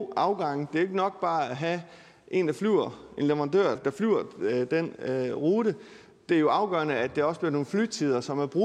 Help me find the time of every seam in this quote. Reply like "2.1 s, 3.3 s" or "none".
3.8 s